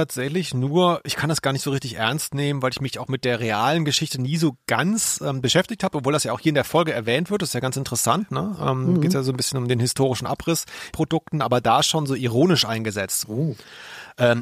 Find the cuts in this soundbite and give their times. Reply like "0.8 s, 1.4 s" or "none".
10.9 s, 13.2 s